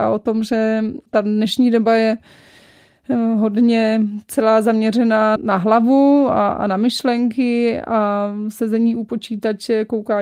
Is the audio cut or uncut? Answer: cut